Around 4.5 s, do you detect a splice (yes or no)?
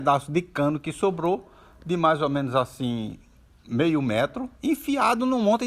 yes